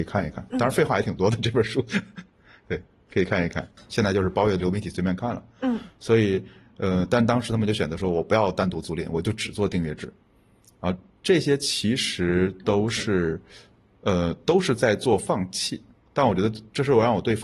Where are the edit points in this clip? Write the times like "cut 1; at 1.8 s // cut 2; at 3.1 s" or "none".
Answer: cut 1; at 3.8 s

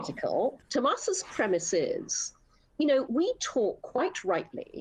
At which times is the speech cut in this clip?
cut 1; at 3.1 s

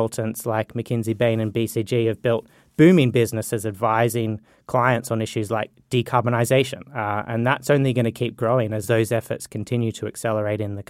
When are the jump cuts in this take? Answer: none

